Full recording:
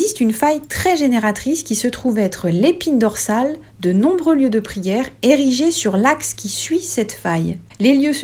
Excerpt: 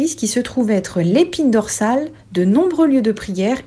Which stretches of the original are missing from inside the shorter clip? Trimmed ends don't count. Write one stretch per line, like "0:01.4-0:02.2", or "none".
none